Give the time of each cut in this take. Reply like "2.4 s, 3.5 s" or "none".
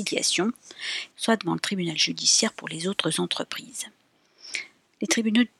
1.1 s